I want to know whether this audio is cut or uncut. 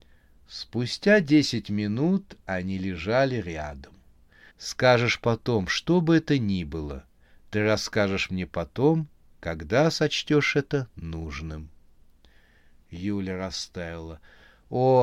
cut